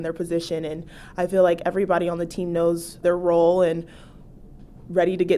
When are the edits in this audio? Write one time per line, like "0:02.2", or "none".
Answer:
0:03.0

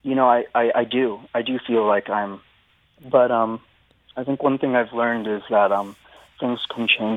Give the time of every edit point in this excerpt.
0:02.9

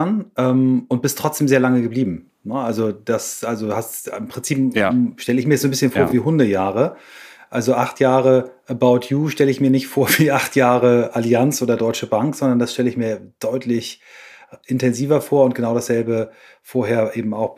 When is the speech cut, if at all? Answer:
none

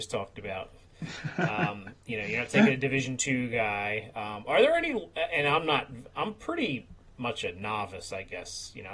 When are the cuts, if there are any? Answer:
none

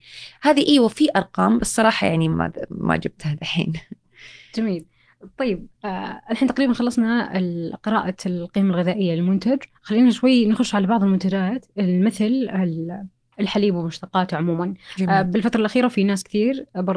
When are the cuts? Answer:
0:02.3
0:09.7

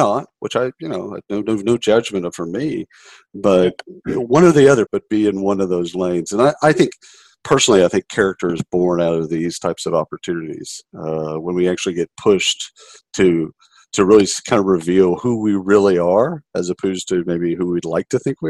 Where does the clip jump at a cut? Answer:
0:04.9

